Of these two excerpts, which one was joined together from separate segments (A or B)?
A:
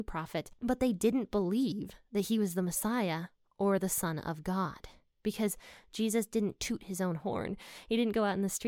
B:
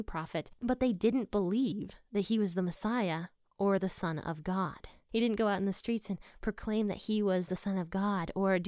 B